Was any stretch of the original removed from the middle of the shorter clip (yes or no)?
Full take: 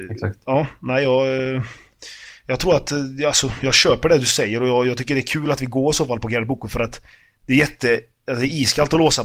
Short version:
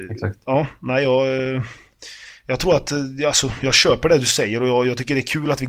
no